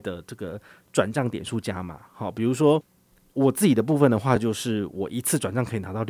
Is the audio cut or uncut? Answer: uncut